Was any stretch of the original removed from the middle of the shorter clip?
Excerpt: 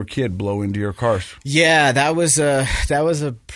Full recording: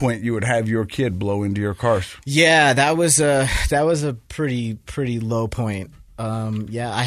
no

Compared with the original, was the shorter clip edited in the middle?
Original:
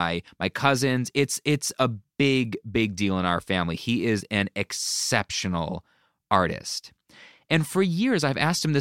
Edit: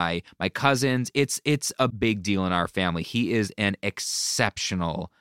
yes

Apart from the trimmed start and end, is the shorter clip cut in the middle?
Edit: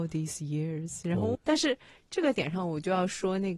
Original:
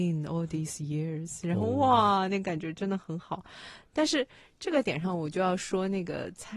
yes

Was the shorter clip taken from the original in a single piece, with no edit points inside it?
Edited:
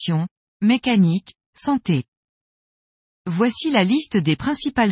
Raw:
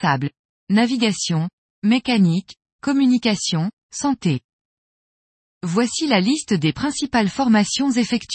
no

